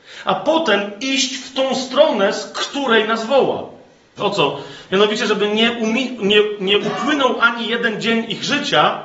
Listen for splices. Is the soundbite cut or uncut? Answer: cut